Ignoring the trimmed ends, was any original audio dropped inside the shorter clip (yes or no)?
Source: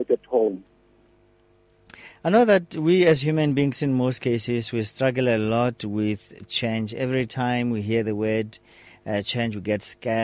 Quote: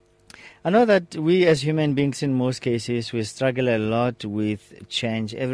no